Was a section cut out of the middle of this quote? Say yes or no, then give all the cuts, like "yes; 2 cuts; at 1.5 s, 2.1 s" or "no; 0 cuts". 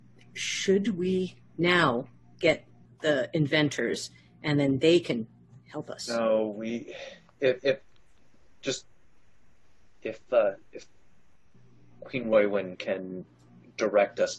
no; 0 cuts